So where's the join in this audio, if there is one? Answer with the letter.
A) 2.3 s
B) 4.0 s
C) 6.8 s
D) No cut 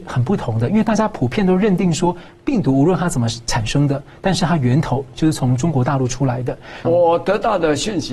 C